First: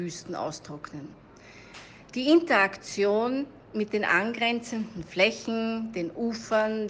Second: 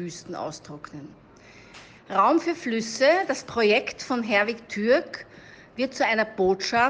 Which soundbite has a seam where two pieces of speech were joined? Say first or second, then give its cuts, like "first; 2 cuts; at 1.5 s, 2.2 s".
second; 1 cut; at 2.0 s